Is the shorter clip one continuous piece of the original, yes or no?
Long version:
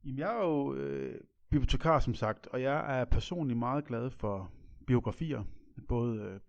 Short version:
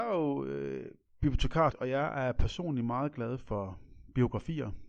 no